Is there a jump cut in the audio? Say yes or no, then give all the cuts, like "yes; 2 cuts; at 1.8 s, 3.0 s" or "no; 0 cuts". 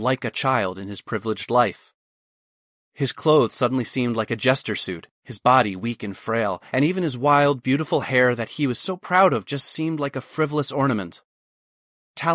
no; 0 cuts